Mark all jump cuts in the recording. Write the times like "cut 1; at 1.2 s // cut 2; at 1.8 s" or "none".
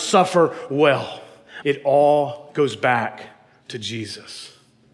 cut 1; at 1.6 s